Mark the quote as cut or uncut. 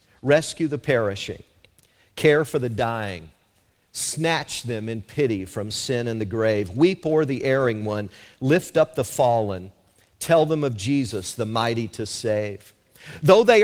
uncut